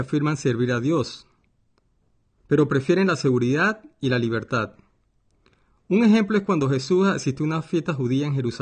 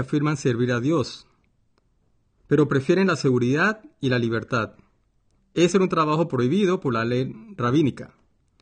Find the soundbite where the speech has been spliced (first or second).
second